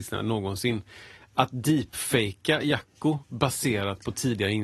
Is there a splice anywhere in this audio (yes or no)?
no